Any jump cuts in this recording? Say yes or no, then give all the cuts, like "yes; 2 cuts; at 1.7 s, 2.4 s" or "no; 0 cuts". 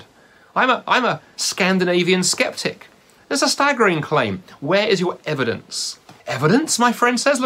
yes; 2 cuts; at 3.2 s, 6.2 s